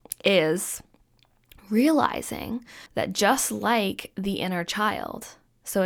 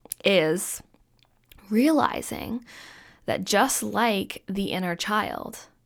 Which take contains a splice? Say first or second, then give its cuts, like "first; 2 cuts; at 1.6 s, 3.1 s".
first; 1 cut; at 2.9 s